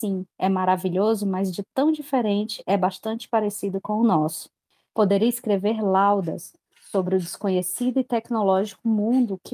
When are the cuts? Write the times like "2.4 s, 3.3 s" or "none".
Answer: 4.9 s